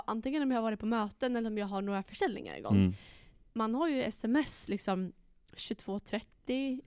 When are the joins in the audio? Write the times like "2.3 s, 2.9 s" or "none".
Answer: none